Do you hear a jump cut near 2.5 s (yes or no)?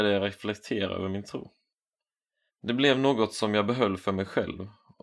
yes